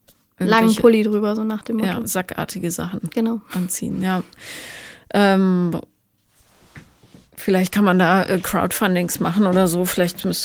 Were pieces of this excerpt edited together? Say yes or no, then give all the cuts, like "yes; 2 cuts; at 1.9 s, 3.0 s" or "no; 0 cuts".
no; 0 cuts